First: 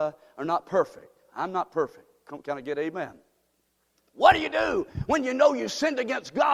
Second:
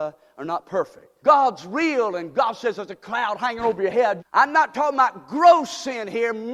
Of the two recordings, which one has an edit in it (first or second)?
second